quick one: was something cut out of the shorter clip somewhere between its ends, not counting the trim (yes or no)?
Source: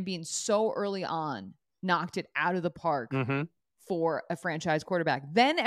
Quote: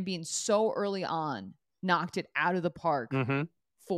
no